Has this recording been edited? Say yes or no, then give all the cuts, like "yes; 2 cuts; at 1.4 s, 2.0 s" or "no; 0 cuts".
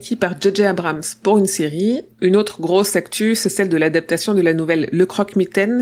yes; 1 cut; at 2.1 s